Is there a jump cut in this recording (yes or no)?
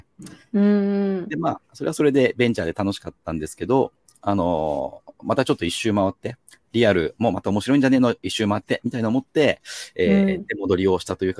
no